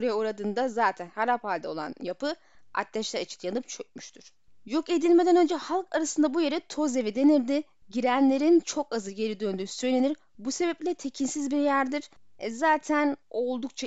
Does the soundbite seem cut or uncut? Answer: uncut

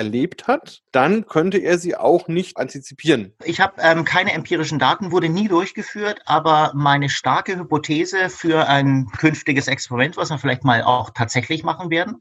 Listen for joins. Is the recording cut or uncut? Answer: uncut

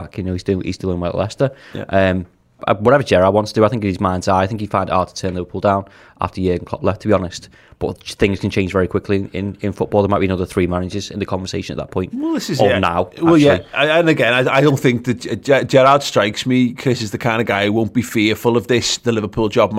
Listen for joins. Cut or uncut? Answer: cut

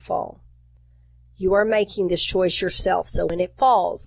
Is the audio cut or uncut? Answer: uncut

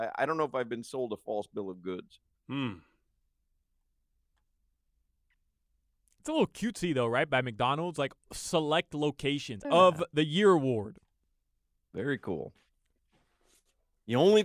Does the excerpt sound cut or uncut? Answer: cut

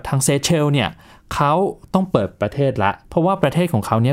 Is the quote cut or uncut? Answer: cut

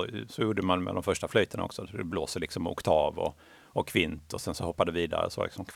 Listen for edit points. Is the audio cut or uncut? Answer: uncut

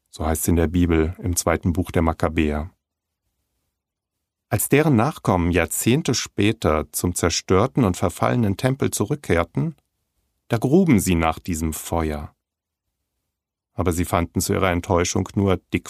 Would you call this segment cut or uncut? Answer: uncut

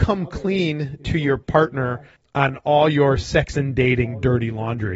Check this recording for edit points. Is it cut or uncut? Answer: uncut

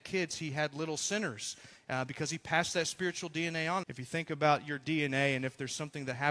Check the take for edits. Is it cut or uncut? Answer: cut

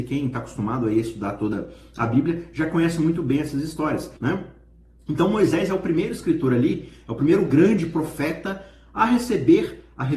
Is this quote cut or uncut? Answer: cut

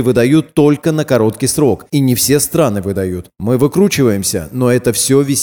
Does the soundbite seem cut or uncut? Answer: uncut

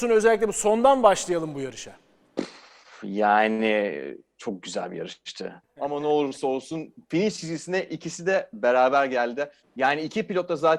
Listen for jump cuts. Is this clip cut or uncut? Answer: cut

